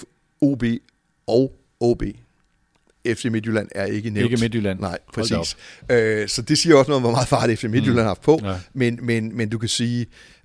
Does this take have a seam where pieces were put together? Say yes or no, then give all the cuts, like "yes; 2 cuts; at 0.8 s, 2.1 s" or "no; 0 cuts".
no; 0 cuts